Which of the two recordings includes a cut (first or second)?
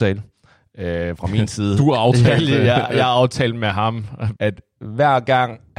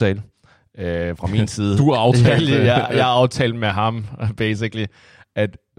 first